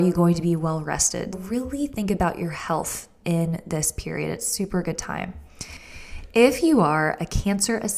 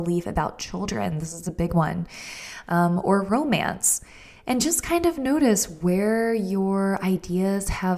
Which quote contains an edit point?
first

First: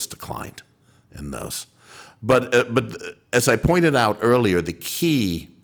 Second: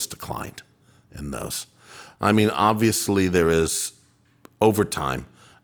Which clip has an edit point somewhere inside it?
second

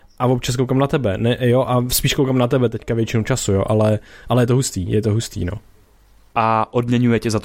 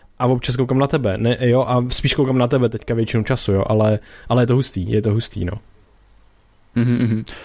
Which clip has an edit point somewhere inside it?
first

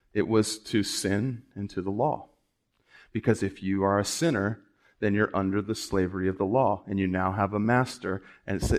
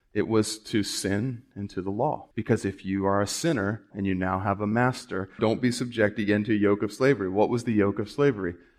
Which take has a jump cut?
second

